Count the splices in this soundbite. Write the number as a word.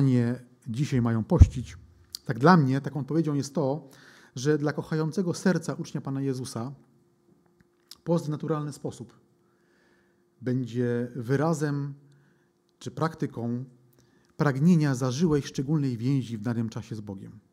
zero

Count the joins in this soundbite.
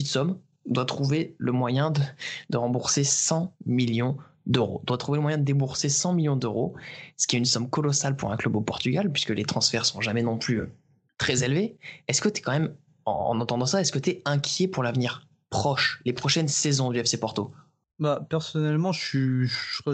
zero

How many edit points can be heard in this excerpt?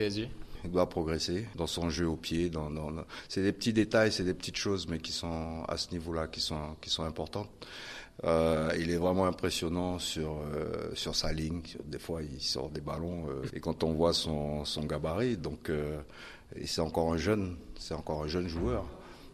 one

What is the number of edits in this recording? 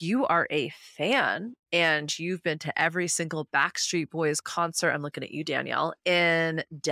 zero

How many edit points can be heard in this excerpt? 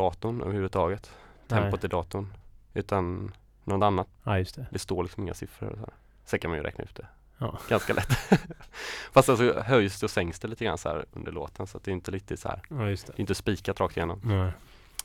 one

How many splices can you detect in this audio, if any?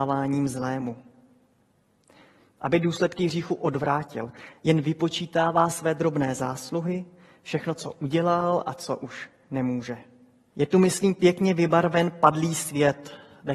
two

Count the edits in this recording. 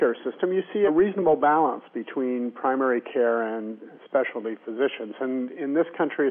zero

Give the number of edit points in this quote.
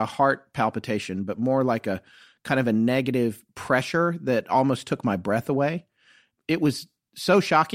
zero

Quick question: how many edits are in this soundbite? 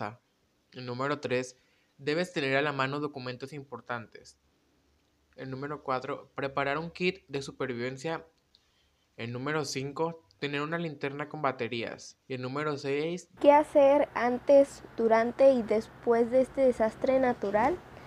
two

